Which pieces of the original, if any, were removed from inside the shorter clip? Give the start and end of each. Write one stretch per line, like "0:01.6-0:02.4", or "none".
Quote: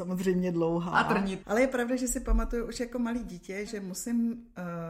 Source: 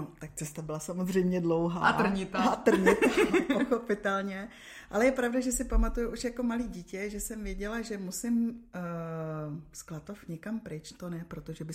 0:02.3-0:04.9
0:07.1-0:07.8